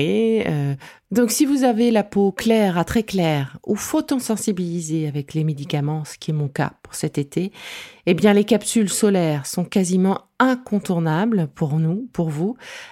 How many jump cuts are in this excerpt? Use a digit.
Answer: 0